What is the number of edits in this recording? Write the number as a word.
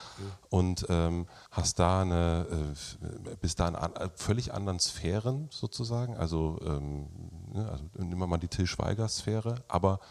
one